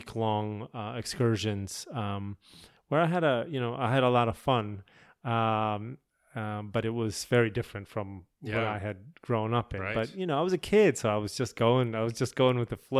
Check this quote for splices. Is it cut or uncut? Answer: uncut